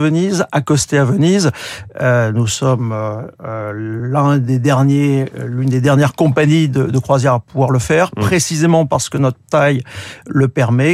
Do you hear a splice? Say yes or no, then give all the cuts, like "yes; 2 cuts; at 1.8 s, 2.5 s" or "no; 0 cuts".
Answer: no; 0 cuts